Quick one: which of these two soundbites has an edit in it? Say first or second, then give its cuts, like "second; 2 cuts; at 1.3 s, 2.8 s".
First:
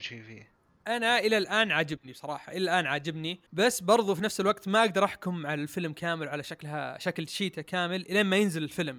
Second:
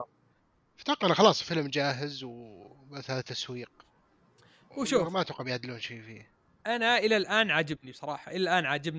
first; 1 cut; at 3.5 s